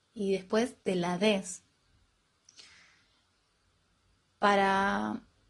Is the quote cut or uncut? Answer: uncut